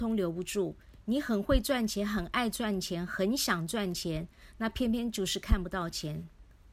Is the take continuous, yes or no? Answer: yes